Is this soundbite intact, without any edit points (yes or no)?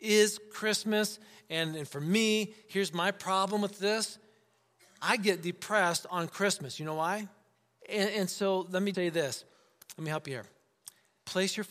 no